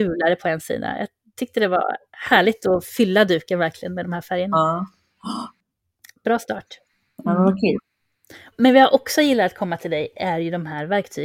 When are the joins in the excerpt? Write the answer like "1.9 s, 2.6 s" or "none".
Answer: none